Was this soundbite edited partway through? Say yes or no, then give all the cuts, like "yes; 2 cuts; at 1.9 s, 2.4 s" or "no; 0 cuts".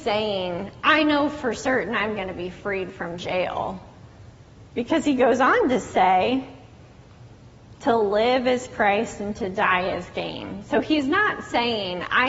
no; 0 cuts